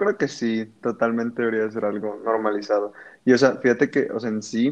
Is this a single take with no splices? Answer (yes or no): yes